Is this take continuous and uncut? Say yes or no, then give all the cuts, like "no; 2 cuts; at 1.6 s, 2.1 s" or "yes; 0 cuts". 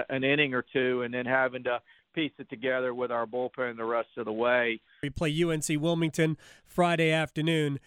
no; 1 cut; at 5.0 s